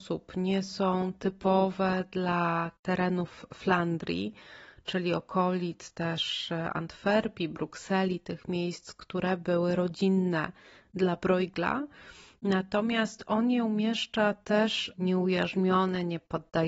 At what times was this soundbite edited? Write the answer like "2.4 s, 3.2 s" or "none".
14.9 s